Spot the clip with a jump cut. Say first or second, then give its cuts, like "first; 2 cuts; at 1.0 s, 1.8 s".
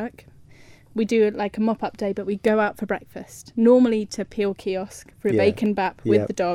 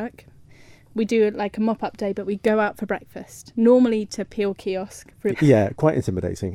second; 1 cut; at 5.3 s